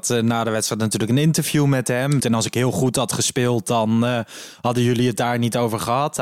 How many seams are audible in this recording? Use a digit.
1